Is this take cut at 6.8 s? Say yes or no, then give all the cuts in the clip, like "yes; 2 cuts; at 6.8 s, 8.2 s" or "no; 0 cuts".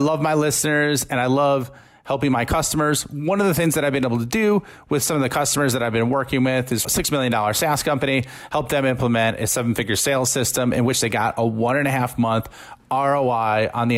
yes; 1 cut; at 6.8 s